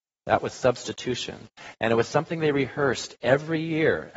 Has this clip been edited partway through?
no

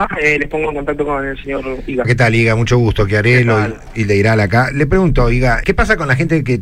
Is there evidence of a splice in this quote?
yes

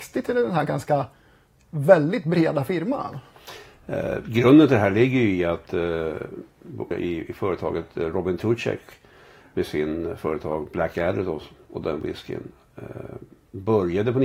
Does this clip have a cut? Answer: yes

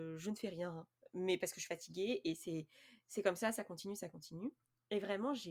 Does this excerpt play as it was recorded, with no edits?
yes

